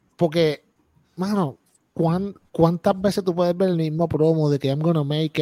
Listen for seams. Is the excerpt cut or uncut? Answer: uncut